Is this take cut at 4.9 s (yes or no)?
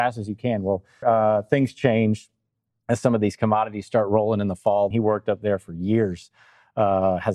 yes